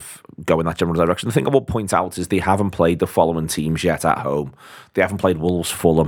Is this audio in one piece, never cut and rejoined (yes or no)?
yes